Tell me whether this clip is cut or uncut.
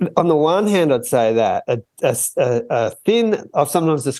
uncut